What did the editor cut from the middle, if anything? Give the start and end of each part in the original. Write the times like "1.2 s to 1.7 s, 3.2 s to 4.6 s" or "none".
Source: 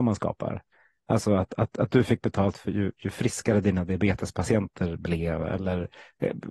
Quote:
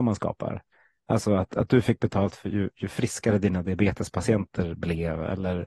1.5 s to 1.7 s